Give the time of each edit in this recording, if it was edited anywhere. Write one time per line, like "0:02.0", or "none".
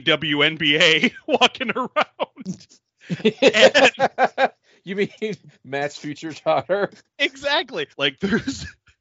0:07.9